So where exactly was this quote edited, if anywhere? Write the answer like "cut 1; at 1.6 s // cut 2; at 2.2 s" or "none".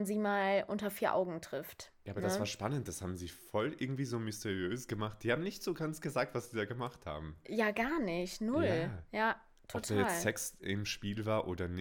none